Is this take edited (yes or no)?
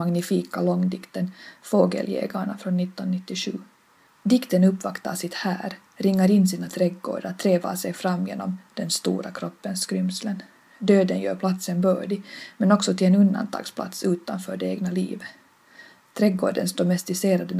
yes